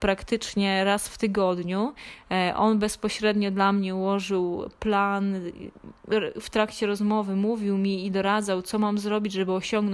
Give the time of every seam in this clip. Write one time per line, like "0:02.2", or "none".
none